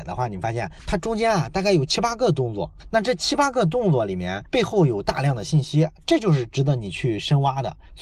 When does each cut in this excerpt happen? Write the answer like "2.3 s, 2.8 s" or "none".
none